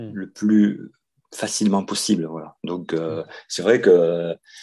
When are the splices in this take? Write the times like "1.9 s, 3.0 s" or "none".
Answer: none